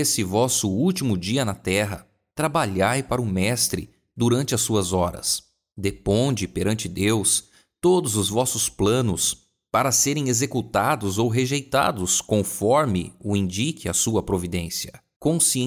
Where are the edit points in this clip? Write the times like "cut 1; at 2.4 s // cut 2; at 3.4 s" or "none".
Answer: none

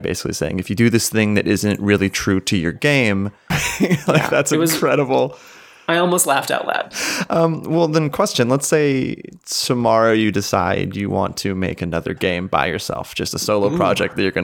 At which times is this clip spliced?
cut 1; at 3.5 s // cut 2; at 6.9 s

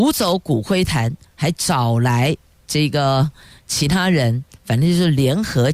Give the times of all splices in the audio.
none

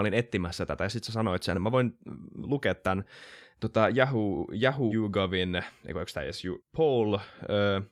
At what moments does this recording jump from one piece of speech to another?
cut 1; at 4.9 s // cut 2; at 6.6 s

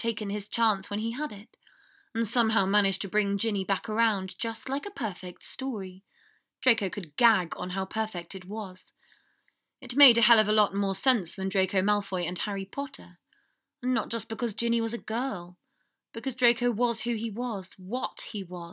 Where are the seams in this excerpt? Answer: none

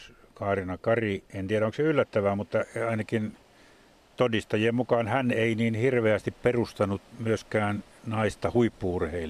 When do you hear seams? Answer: cut 1; at 1.3 s

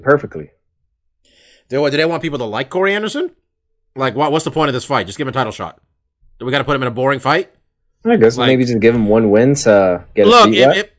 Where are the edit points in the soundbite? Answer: none

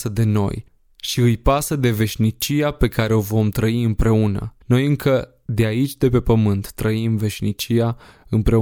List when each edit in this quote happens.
cut 1; at 4.6 s

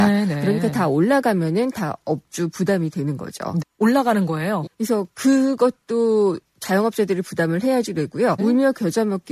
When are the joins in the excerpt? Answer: cut 1; at 3.6 s // cut 2; at 4.7 s // cut 3; at 8.4 s

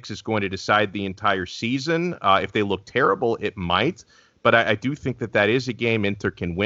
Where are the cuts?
none

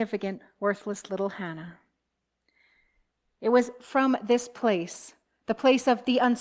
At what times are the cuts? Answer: none

